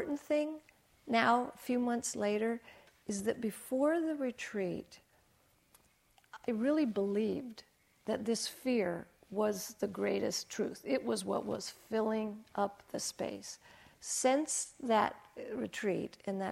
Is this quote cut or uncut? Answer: uncut